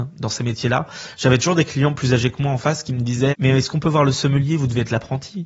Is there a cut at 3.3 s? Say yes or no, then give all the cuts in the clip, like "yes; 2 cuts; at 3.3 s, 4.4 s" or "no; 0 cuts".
yes; 1 cut; at 3.3 s